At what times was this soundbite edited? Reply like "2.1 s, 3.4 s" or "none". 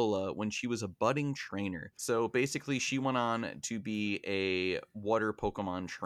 2.0 s